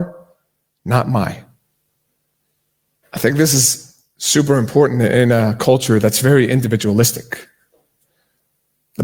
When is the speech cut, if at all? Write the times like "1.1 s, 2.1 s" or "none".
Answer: 3.0 s